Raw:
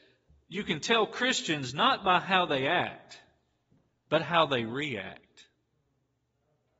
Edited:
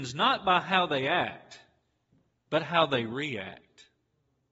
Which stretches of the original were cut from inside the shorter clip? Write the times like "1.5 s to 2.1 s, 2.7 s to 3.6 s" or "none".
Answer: none